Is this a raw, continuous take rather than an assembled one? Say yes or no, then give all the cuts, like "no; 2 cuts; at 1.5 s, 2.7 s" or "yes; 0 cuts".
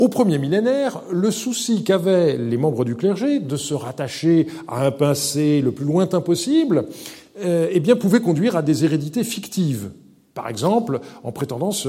yes; 0 cuts